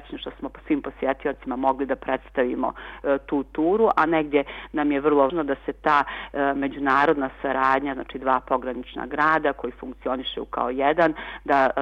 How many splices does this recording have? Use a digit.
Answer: 1